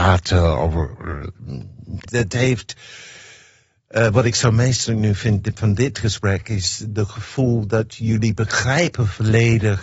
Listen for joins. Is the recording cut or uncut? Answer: cut